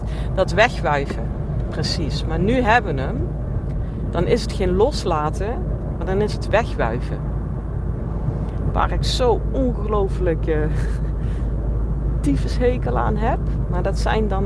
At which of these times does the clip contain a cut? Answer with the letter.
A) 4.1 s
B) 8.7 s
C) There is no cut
B